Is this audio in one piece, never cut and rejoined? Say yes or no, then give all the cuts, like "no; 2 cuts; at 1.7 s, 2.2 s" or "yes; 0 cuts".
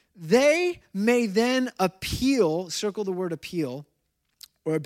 yes; 0 cuts